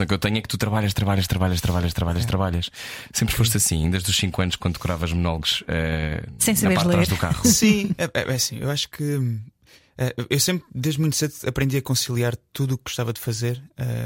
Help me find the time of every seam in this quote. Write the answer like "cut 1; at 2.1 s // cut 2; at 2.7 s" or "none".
none